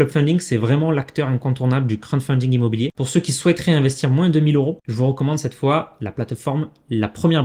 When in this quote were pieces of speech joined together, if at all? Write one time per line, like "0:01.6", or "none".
0:02.9